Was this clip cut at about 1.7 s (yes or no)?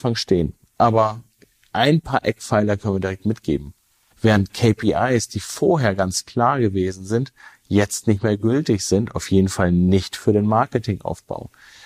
no